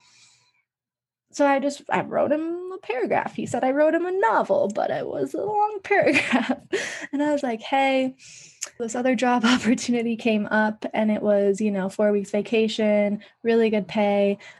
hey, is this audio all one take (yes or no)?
no